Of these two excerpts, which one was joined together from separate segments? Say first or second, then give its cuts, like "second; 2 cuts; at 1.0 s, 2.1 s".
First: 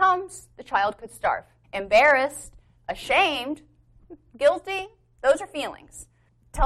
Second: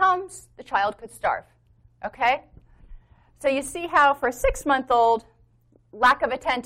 first; 1 cut; at 1.6 s